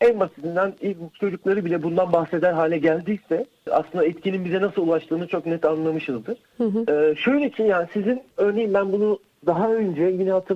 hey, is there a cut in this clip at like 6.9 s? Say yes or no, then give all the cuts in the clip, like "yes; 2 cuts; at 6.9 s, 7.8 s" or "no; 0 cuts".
no; 0 cuts